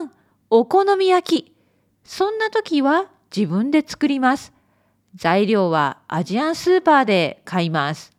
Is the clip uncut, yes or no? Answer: yes